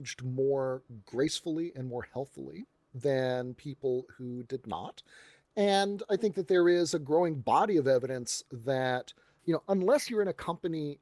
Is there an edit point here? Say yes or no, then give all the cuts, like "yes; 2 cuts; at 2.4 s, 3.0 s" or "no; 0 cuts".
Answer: no; 0 cuts